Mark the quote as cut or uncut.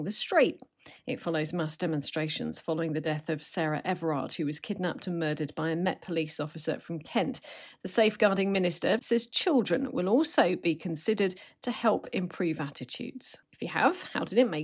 cut